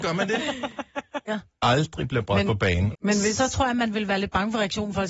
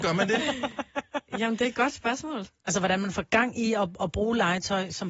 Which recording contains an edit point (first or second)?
first